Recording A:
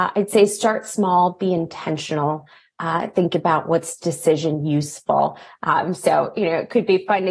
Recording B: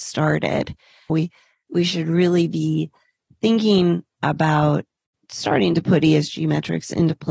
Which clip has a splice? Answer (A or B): B